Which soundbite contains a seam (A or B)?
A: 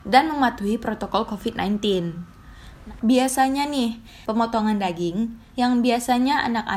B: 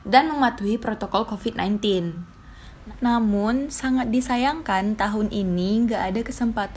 A